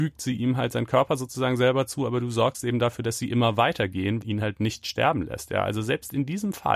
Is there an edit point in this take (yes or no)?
yes